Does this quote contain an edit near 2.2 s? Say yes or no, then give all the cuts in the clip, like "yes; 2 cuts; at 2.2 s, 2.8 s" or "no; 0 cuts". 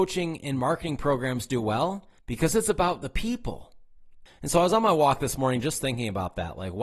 yes; 2 cuts; at 2.2 s, 4.3 s